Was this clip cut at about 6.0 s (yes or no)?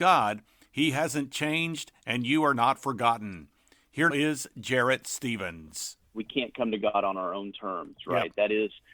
no